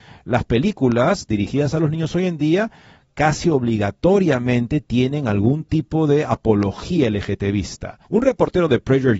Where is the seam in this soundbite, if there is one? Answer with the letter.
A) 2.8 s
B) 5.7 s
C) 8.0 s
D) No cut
C